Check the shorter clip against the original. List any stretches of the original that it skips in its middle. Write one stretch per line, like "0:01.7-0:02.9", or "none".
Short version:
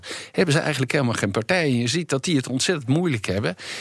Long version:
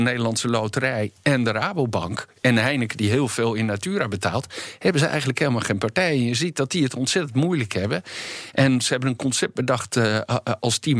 none